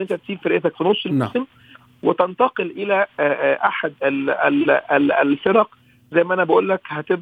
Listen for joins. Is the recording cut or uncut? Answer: uncut